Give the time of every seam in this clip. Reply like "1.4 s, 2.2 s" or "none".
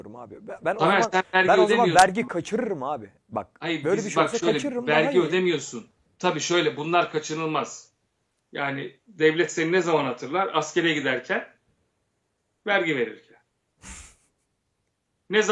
6.1 s